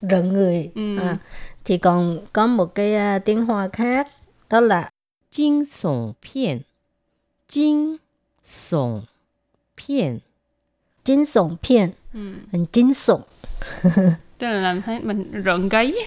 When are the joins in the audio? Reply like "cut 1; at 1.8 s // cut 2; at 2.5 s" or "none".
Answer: none